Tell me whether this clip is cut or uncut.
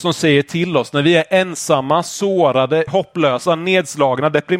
cut